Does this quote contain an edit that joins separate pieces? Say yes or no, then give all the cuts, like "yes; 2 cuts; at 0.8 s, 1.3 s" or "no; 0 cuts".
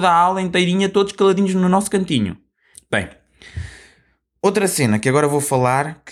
yes; 1 cut; at 2.7 s